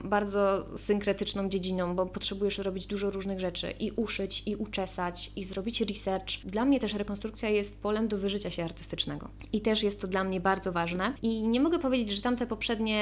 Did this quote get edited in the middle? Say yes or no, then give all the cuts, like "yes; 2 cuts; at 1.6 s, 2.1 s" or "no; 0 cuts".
no; 0 cuts